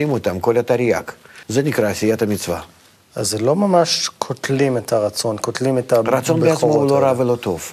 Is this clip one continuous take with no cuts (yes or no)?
no